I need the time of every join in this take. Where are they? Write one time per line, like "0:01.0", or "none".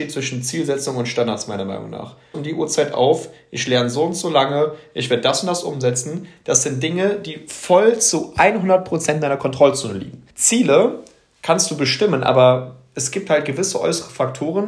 0:02.3
0:10.3